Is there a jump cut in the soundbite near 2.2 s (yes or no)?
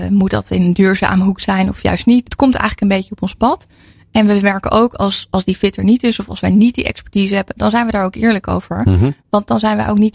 yes